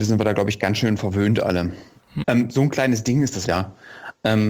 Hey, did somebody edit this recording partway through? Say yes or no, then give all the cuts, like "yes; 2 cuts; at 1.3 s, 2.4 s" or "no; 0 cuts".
yes; 2 cuts; at 2.2 s, 3.4 s